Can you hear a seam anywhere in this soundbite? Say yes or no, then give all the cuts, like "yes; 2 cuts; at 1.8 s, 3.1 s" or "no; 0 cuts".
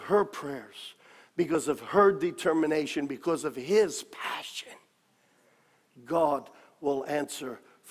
no; 0 cuts